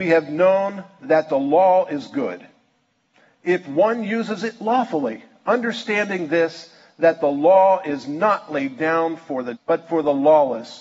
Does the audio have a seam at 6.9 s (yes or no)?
no